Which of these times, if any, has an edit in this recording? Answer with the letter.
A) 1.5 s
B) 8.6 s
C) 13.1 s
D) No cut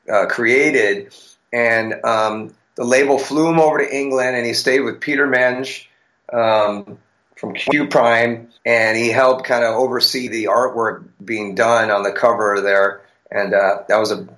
B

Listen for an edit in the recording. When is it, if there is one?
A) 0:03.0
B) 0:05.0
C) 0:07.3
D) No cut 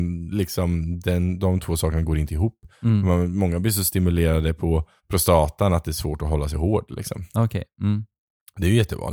B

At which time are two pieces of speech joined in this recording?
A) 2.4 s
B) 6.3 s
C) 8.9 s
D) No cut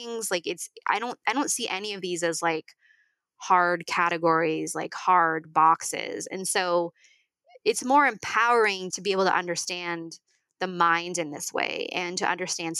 C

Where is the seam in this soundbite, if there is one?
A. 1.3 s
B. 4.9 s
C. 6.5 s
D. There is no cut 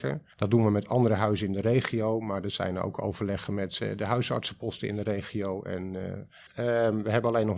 C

